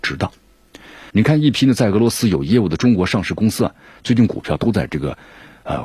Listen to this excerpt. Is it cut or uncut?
cut